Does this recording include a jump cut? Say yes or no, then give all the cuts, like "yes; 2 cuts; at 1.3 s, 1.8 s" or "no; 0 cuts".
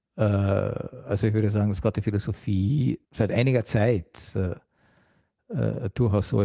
no; 0 cuts